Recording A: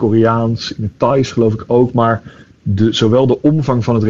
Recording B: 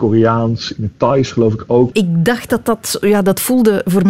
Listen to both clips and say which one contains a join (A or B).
B